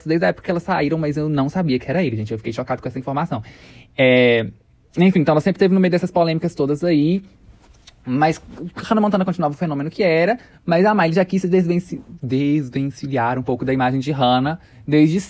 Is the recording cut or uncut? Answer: uncut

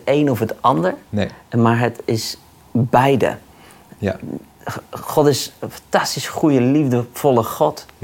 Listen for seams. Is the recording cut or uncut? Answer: uncut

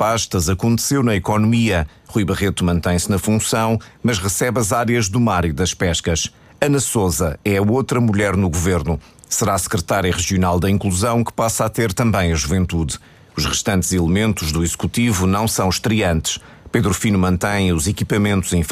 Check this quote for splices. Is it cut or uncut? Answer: uncut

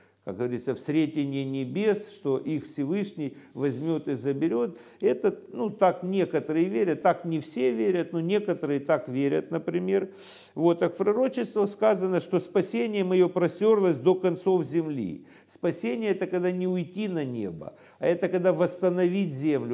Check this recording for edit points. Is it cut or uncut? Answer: uncut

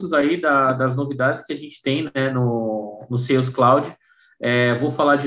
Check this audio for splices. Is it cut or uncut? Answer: uncut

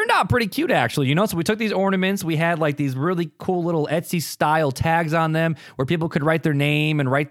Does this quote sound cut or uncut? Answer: uncut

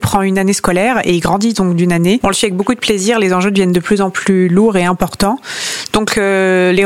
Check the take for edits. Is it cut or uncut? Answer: cut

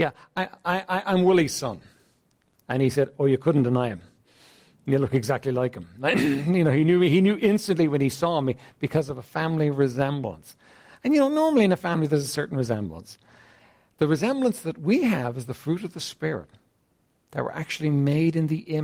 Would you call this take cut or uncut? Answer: uncut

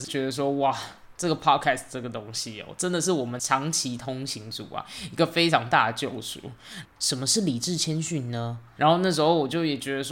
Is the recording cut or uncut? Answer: cut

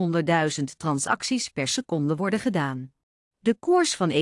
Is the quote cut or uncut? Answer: cut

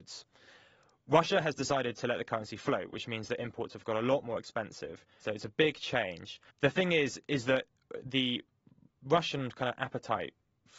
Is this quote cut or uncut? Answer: cut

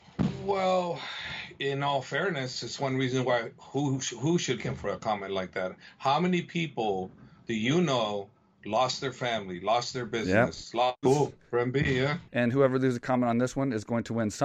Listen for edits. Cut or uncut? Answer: cut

